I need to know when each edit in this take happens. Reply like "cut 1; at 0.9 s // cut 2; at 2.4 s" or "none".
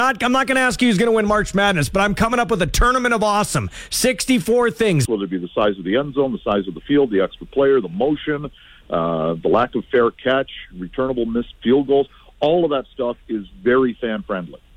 cut 1; at 5.1 s